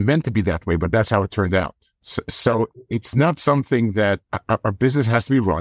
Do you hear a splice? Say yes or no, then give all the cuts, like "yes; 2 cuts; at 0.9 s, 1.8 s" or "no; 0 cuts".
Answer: no; 0 cuts